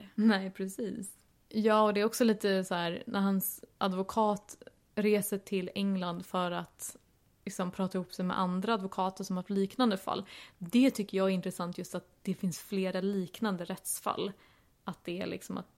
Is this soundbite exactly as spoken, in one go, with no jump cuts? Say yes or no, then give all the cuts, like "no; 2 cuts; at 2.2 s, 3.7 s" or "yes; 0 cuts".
yes; 0 cuts